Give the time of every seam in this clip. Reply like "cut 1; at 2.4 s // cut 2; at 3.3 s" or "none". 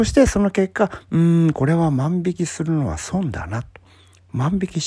none